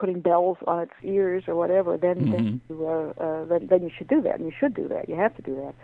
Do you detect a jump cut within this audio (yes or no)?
no